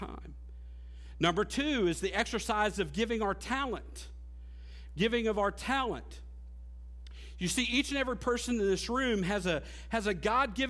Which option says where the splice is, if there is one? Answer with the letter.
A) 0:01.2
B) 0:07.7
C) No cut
C